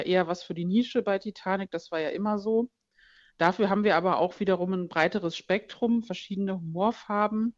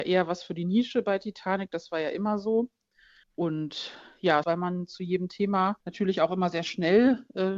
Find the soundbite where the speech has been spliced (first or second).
second